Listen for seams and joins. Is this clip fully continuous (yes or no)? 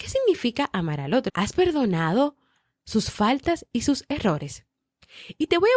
no